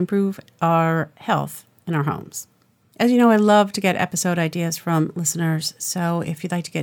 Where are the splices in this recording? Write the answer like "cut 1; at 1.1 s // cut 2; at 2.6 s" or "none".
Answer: cut 1; at 2.8 s